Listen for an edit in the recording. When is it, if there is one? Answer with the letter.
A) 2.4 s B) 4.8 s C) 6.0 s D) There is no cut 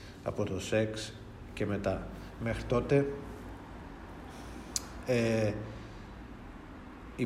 D